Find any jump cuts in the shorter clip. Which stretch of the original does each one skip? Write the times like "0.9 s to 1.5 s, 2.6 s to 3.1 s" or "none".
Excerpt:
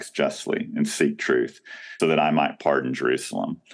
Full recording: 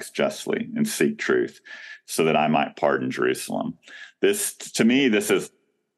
2.0 s to 2.2 s